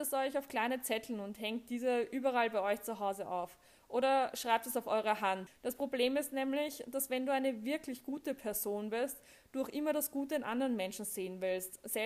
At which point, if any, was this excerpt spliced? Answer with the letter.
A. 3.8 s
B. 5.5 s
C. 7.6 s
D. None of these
B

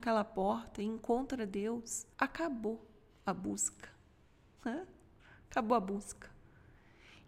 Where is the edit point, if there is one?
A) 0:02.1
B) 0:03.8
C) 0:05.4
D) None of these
A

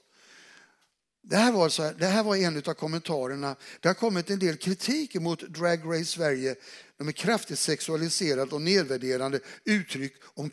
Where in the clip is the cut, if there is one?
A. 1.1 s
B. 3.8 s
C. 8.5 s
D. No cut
D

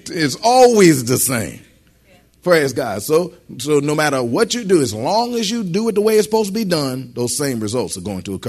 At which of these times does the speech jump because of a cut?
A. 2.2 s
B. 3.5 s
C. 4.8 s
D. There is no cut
D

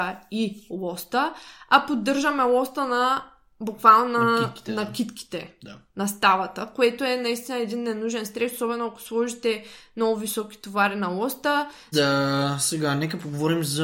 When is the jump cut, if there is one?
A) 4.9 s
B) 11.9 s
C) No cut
B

